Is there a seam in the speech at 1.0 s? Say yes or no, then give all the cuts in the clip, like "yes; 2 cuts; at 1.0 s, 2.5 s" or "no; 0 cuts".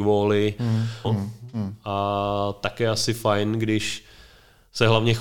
yes; 1 cut; at 1.0 s